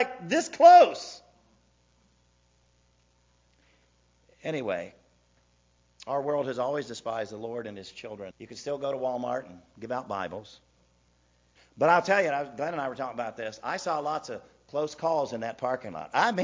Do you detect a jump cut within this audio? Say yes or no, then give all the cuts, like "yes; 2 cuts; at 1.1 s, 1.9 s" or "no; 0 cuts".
yes; 2 cuts; at 8.3 s, 11.6 s